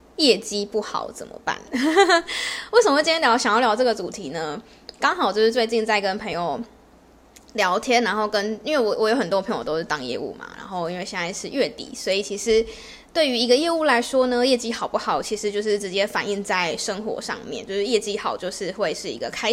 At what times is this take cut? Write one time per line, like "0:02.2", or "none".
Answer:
none